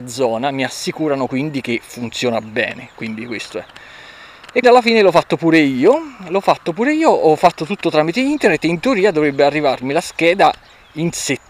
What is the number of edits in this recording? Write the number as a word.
one